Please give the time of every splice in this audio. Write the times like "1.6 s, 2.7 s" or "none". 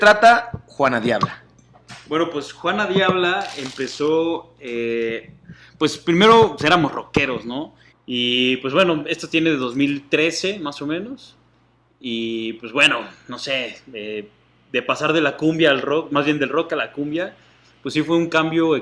6.6 s, 7.9 s